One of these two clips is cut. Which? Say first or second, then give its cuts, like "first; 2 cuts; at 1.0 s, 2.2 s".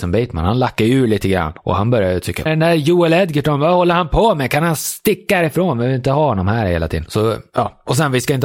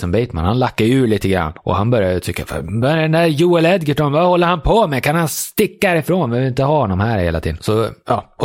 first; 1 cut; at 2.5 s